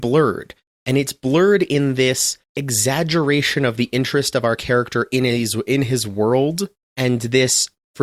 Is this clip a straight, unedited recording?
no; 1 cut; at 2.4 s

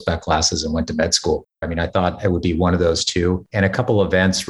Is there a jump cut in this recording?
yes; 1 cut; at 1.6 s

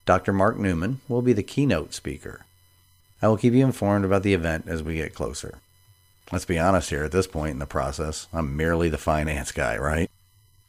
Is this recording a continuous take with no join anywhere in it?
no; 2 cuts; at 1.0 s, 6.1 s

